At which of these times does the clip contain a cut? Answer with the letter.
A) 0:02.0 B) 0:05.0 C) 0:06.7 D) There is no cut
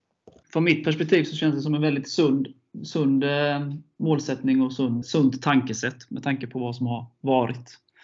B